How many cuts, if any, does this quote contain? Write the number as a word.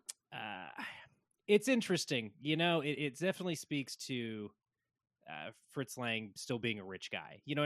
zero